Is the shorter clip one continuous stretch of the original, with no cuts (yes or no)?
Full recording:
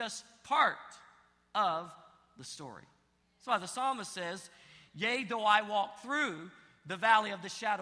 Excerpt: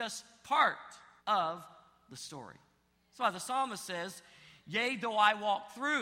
no